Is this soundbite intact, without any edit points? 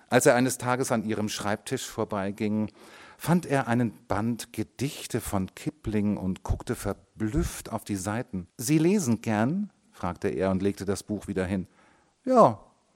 no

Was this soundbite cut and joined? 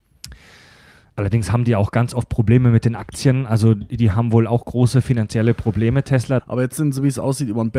yes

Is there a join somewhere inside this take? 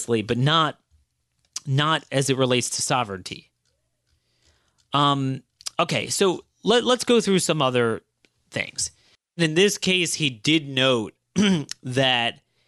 no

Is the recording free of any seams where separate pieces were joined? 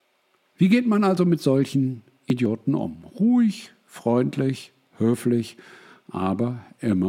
yes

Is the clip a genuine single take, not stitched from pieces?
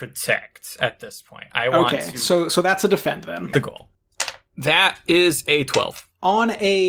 no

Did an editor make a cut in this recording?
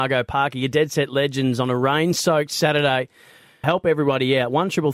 yes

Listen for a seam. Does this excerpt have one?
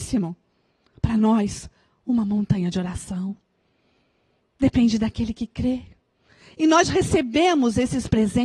no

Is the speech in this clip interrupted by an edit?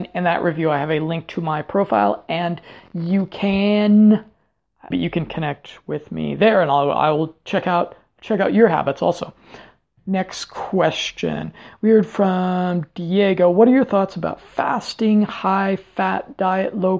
yes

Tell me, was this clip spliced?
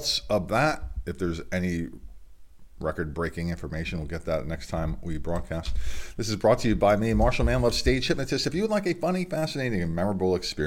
no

